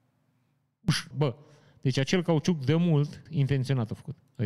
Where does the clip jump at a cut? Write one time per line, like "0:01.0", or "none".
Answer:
0:01.1
0:03.3